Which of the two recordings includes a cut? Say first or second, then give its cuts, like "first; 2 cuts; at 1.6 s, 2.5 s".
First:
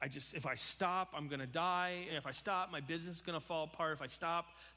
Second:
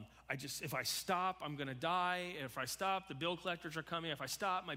first; 1 cut; at 2.1 s